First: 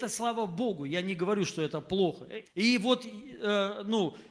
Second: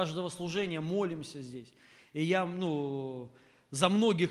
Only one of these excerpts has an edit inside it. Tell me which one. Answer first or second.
first